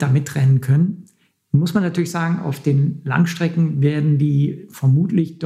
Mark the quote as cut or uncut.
uncut